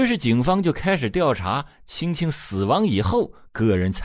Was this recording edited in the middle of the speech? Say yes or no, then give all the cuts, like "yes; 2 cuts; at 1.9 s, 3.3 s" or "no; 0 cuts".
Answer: no; 0 cuts